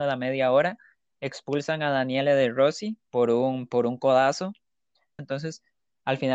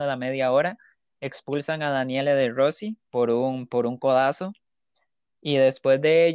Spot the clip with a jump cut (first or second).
first